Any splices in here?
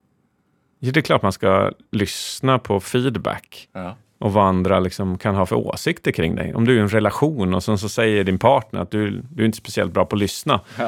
no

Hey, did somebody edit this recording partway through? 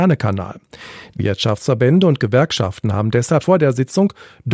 yes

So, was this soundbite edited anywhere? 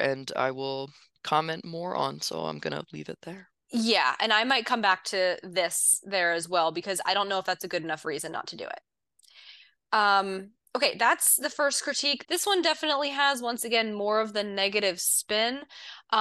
yes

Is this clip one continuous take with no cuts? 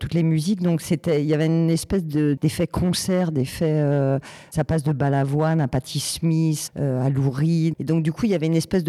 no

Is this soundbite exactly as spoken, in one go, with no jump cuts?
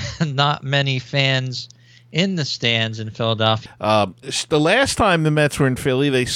no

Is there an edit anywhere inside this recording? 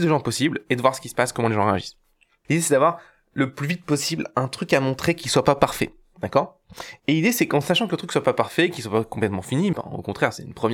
yes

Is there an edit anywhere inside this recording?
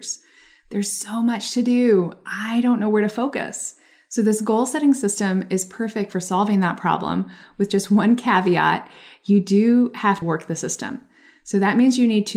yes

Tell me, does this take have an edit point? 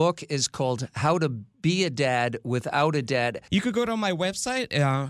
yes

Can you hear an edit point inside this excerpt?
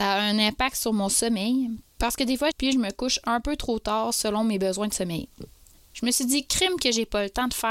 yes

